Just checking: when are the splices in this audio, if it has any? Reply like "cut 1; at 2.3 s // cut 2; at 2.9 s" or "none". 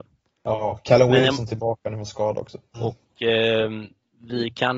cut 1; at 2.7 s